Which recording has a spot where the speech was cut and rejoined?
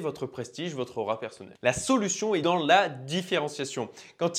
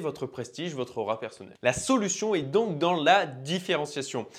first; 1 cut; at 2.4 s

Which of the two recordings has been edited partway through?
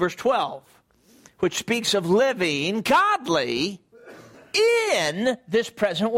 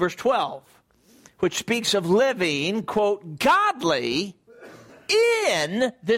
first; 1 cut; at 2.8 s

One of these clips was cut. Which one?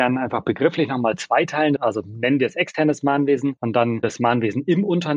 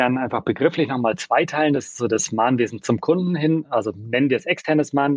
first; 1 cut; at 1.8 s

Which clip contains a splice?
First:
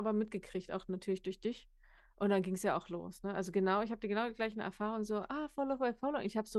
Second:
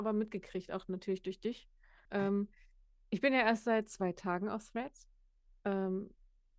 second; 1 cut; at 2.1 s

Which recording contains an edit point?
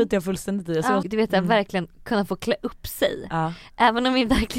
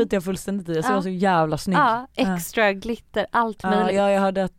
first; 1 cut; at 1.0 s

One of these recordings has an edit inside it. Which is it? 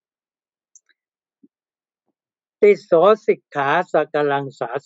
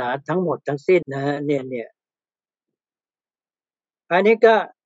second; 1 cut; at 1.0 s

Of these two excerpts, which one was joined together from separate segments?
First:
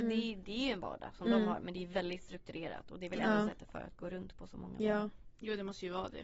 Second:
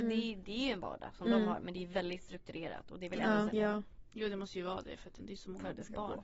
second; 2 cuts; at 3.5 s, 5.2 s

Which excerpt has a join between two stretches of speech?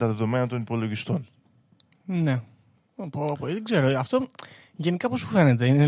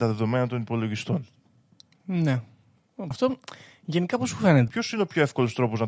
second; 2 cuts; at 3.1 s, 4.7 s

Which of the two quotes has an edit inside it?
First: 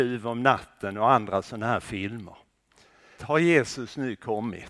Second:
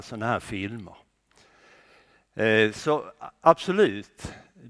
first; 1 cut; at 3.2 s

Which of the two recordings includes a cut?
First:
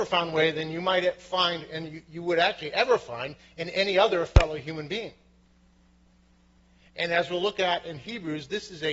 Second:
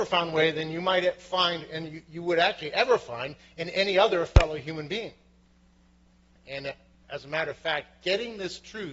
second; 1 cut; at 6.3 s

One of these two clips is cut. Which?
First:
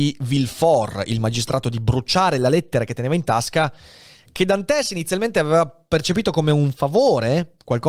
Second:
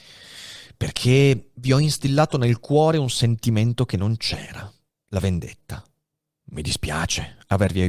second; 1 cut; at 6.4 s

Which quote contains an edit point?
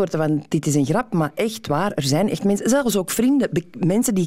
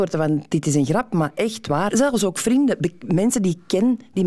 second; 1 cut; at 1.9 s

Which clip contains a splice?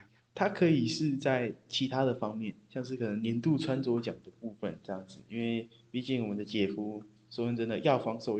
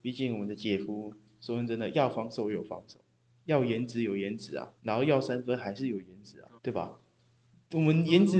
second; 2 cuts; at 4.8 s, 6.6 s

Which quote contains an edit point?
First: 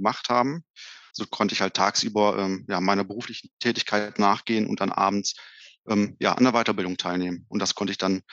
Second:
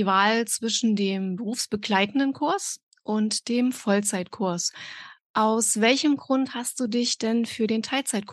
first; 1 cut; at 1.1 s

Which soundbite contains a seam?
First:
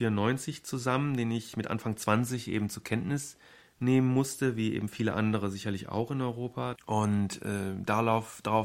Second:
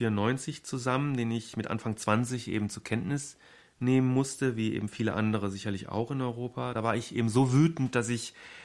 first; 1 cut; at 6.7 s

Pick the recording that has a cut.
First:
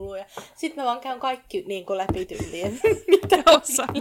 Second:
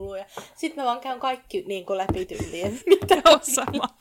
second; 1 cut; at 2.8 s

